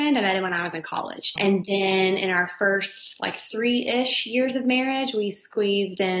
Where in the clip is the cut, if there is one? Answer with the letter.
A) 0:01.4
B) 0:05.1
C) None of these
A